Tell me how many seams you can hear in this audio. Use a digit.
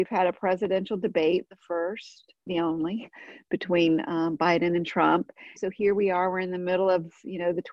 2